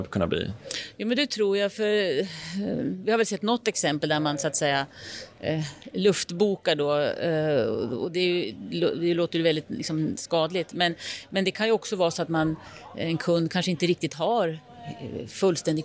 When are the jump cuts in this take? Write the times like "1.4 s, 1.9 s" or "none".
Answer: none

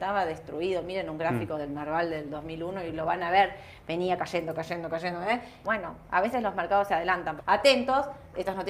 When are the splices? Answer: 5.6 s, 7.4 s

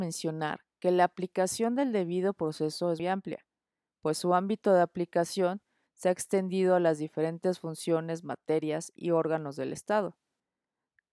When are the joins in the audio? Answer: 3.0 s

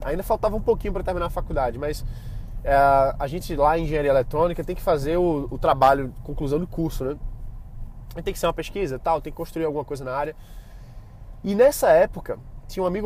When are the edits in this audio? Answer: none

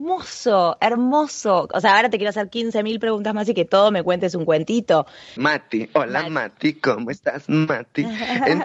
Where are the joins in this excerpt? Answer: 5.4 s

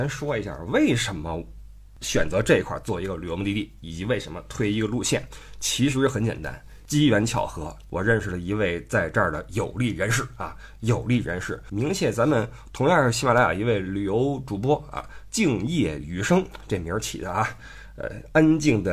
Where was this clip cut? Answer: 11.7 s

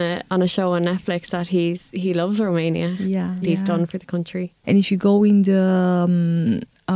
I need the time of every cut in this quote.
3.4 s, 4.6 s

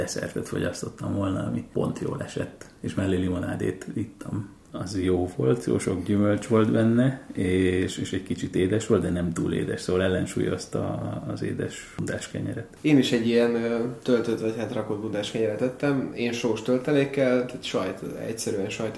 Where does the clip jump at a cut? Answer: none

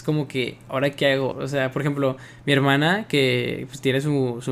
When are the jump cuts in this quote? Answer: 1.3 s

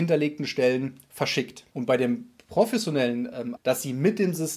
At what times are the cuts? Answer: 1.7 s, 3.6 s

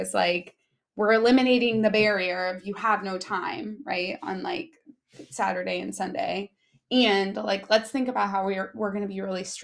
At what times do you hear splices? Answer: none

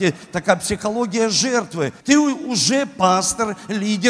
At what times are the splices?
2.0 s

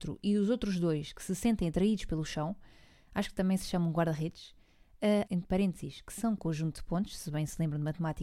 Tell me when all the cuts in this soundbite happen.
5.3 s

